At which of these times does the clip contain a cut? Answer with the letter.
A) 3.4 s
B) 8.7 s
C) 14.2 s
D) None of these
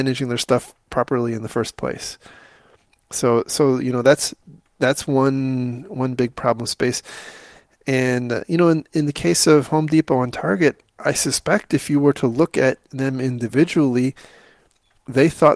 D